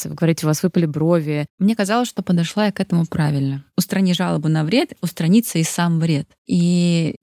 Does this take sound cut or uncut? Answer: cut